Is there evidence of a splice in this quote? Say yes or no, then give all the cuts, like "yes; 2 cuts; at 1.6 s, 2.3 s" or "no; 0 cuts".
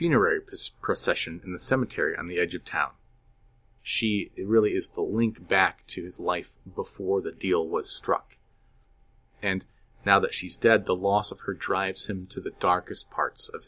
yes; 1 cut; at 3.8 s